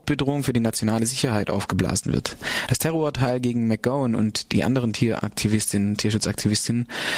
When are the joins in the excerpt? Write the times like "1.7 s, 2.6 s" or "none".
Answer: 2.7 s